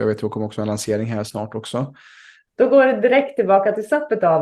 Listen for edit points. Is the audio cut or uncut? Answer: cut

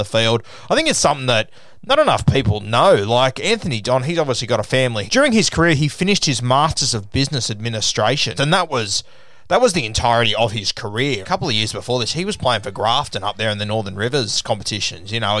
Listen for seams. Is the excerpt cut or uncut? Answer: cut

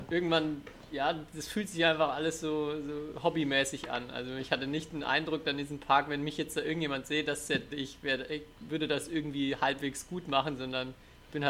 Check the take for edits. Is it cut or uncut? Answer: cut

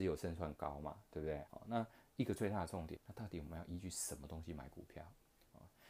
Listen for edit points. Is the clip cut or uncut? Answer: cut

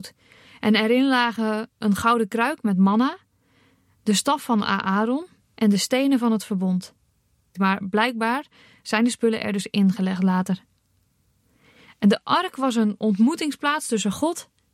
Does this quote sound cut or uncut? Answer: cut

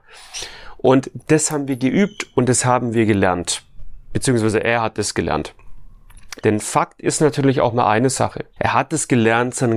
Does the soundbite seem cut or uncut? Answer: cut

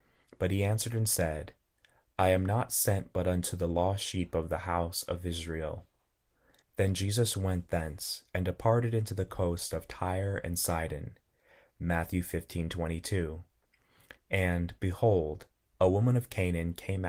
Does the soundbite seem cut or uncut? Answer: cut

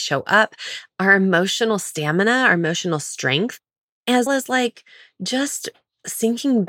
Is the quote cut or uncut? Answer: cut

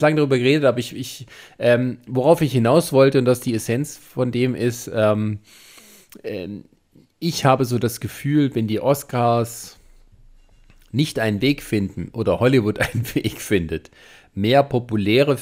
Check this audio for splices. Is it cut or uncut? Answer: uncut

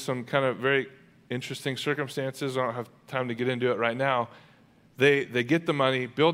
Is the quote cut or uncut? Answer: uncut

